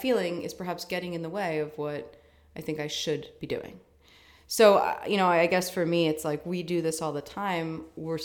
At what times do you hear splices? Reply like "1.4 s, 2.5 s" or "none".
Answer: none